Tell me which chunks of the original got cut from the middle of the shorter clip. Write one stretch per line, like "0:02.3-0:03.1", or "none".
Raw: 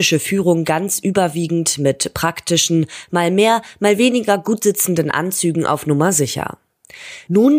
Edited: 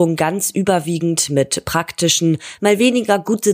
0:03.1-0:03.8